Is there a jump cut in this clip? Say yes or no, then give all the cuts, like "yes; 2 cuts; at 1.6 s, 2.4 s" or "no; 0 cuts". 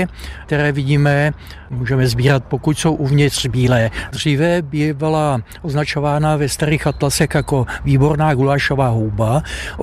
yes; 1 cut; at 4.1 s